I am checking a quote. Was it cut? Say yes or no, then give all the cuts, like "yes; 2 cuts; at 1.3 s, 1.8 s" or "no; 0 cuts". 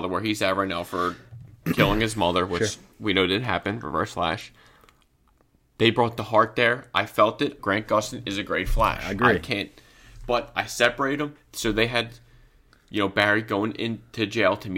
yes; 1 cut; at 7.6 s